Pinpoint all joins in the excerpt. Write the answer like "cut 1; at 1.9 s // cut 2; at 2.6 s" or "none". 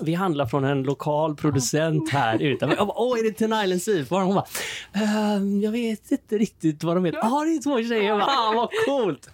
cut 1; at 7.1 s // cut 2; at 8.3 s